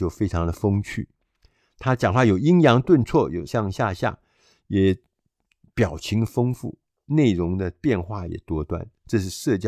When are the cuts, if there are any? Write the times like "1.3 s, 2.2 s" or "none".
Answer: 3.5 s